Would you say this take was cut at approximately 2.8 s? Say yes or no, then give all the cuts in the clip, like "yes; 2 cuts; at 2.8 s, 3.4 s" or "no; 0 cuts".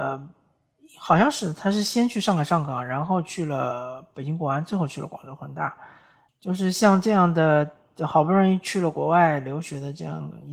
no; 1 cut; at 6.3 s